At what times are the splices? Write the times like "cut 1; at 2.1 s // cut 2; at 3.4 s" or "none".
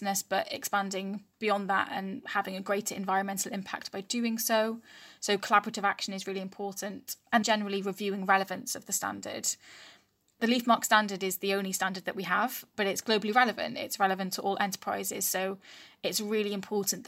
cut 1; at 7.4 s